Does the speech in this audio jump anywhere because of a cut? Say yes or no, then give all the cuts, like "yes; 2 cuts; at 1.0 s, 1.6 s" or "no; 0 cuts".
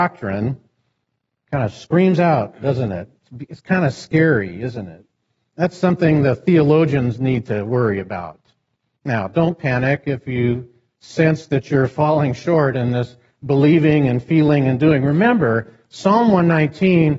yes; 1 cut; at 9.0 s